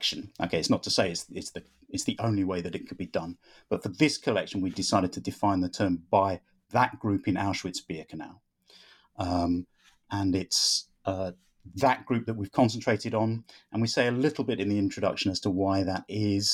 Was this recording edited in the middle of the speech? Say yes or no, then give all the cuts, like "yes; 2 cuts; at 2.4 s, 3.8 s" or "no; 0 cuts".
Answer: no; 0 cuts